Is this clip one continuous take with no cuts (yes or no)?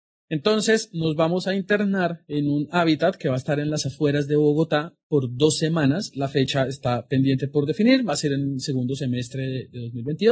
yes